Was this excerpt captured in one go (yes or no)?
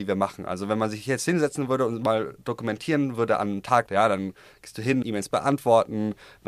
no